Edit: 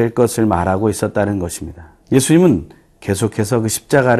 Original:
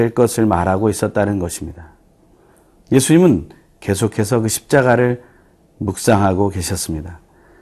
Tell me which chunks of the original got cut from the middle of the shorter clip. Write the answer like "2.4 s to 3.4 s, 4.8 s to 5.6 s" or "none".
2.0 s to 2.8 s